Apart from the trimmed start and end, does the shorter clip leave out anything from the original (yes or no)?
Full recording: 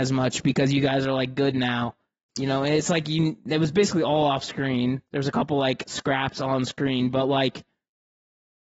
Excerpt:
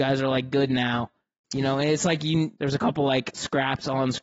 yes